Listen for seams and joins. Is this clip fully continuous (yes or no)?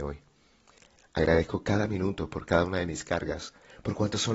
no